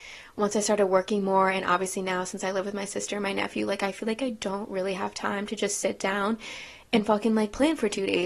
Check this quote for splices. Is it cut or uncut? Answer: uncut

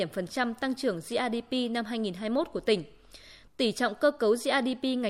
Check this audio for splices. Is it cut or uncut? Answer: uncut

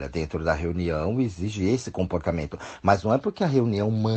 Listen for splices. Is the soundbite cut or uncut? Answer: uncut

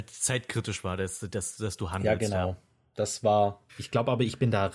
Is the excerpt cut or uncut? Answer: cut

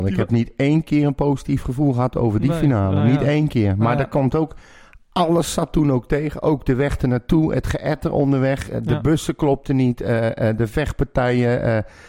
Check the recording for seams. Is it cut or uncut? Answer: uncut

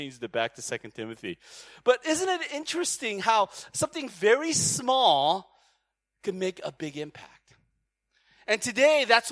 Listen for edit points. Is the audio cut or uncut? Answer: uncut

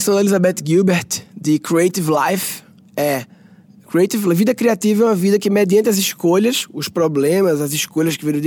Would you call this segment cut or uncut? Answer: uncut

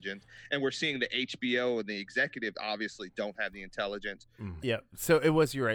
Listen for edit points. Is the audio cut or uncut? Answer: cut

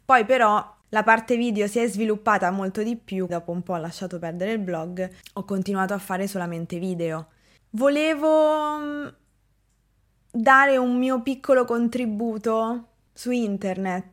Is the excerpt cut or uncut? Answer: cut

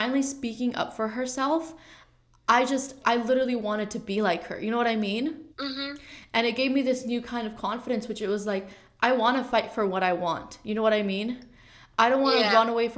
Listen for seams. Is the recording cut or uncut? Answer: cut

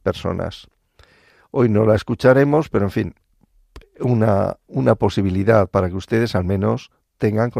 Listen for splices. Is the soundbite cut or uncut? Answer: uncut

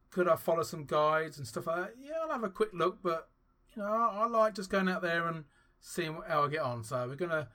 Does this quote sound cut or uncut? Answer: uncut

